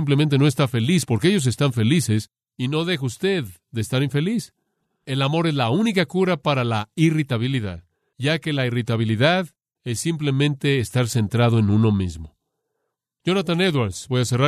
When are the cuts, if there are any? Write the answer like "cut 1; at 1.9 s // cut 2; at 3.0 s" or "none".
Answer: cut 1; at 9.8 s